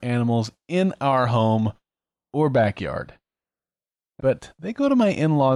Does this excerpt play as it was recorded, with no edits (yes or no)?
no